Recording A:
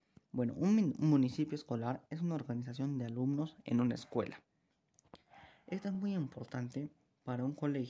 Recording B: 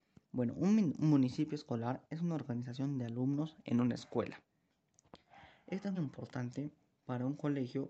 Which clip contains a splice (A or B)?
B